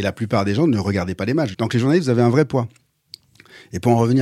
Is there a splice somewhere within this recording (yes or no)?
yes